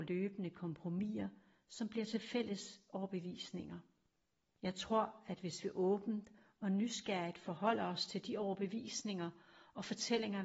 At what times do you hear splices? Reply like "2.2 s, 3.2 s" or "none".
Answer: 4.5 s